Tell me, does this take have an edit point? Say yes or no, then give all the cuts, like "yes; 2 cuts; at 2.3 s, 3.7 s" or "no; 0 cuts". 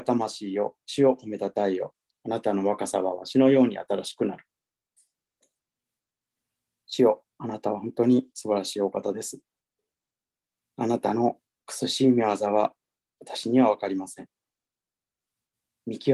yes; 1 cut; at 2.1 s